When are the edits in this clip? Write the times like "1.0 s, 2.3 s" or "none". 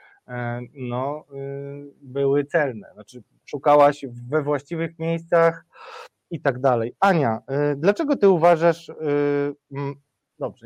none